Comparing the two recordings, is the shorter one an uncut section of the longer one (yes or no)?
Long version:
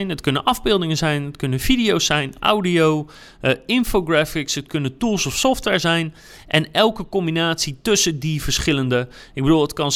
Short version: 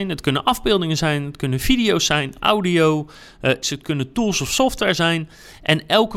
no